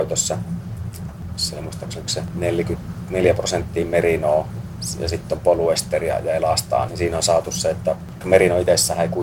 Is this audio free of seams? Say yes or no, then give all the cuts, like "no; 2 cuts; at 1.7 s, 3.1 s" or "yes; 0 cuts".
no; 2 cuts; at 1.1 s, 6.9 s